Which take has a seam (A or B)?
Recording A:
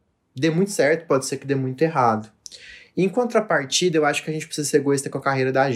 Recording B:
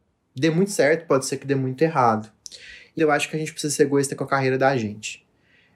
B